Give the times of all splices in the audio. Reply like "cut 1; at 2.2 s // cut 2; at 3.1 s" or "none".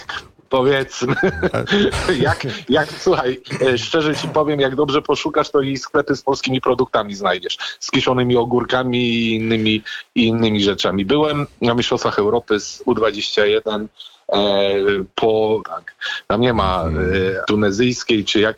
cut 1; at 15.6 s // cut 2; at 17.4 s